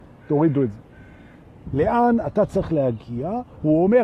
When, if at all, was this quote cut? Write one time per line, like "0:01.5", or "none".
0:01.7